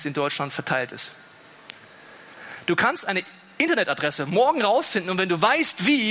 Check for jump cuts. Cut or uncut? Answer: uncut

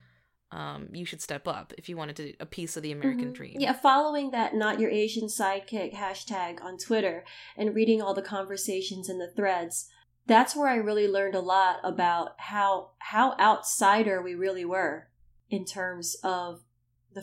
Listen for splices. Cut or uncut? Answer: uncut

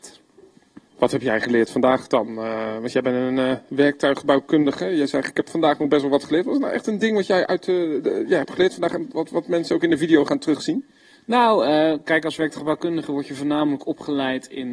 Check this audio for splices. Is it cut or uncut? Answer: uncut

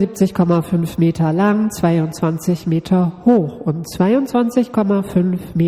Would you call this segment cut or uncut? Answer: uncut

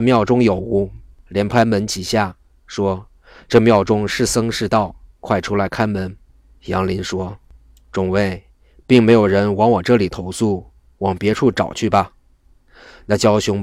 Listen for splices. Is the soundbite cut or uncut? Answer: cut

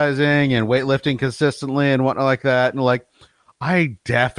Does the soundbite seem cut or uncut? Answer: uncut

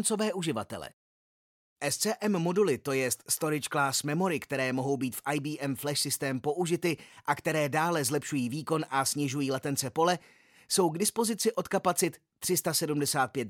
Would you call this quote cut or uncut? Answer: uncut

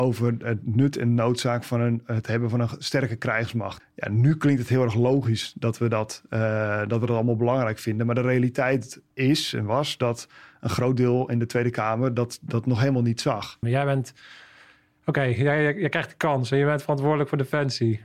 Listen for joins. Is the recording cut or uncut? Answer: cut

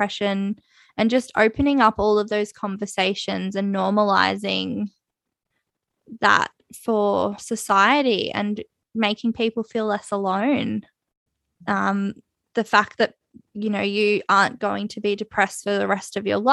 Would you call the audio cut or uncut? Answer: cut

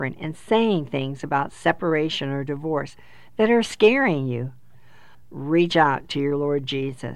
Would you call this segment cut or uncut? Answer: uncut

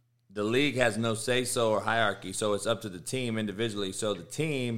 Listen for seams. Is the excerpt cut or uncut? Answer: uncut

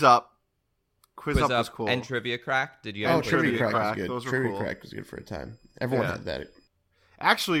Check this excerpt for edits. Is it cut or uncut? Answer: uncut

